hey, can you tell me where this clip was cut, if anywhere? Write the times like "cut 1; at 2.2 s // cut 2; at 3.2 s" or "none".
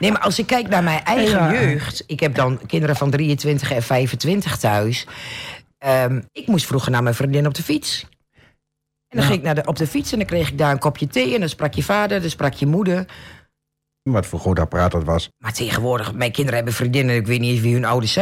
cut 1; at 6.3 s // cut 2; at 14.1 s // cut 3; at 15.3 s